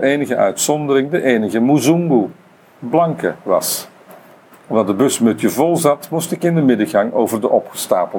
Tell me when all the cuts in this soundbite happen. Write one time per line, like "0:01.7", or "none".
none